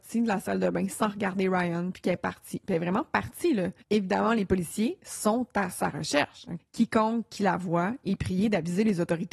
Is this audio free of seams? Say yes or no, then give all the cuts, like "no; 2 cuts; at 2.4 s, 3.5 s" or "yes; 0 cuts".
no; 2 cuts; at 3.8 s, 6.6 s